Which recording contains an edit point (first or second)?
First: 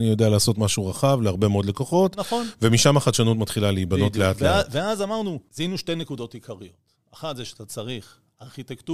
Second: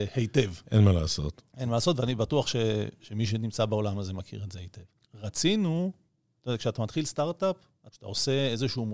second